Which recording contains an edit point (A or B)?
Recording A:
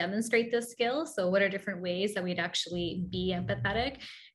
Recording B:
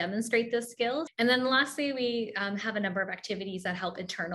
B